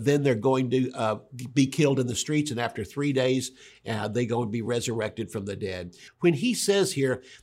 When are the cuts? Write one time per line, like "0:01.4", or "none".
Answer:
0:06.1